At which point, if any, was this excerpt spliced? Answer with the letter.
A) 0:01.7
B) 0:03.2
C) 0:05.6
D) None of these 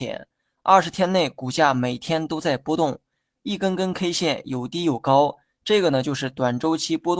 D